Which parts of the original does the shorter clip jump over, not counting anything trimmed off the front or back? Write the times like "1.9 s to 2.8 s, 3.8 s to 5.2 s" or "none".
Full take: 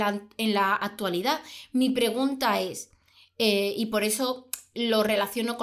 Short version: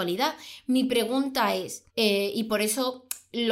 2.9 s to 3.3 s